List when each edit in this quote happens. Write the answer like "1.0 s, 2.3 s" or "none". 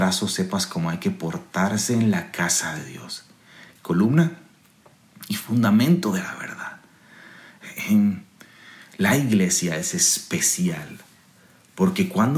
3.8 s